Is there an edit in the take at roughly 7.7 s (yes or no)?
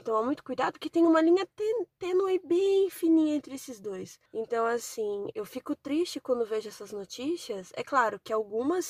no